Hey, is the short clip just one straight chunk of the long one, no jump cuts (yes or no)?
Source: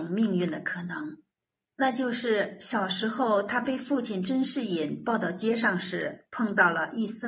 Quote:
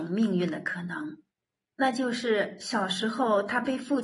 yes